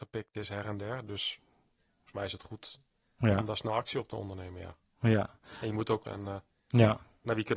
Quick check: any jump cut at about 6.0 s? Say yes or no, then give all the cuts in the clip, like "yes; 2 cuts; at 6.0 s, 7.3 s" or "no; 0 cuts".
yes; 1 cut; at 6.0 s